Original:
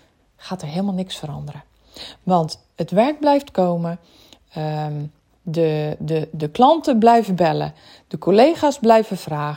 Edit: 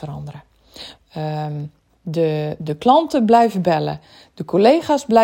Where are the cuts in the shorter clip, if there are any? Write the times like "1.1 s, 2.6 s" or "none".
1.0 s, 2.6 s